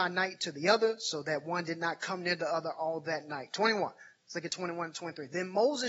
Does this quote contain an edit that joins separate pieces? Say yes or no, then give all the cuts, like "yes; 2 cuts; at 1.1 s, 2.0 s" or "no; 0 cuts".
no; 0 cuts